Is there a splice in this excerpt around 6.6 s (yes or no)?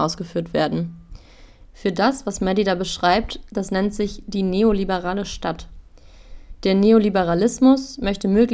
no